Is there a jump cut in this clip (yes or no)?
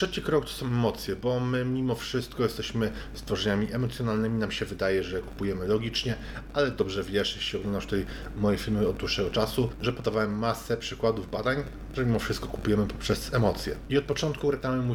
no